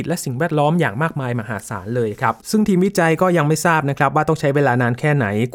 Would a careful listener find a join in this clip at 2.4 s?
yes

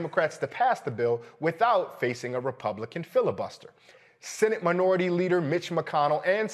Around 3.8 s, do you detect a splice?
no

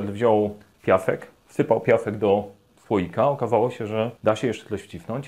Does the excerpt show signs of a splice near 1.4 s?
no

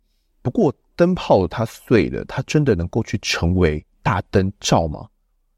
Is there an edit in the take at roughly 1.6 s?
no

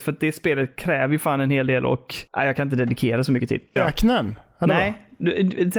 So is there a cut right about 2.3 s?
yes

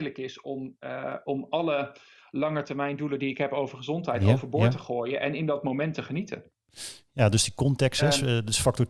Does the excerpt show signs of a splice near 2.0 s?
no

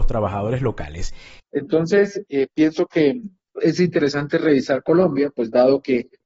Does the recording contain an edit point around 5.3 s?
no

